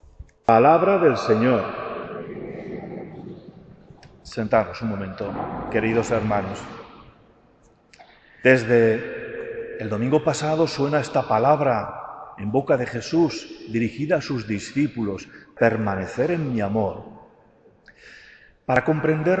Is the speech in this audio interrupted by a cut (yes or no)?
yes